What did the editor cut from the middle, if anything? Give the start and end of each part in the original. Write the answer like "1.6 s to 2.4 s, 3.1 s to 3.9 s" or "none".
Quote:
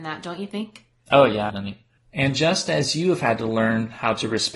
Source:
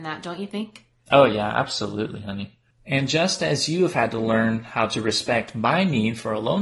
1.5 s to 2.2 s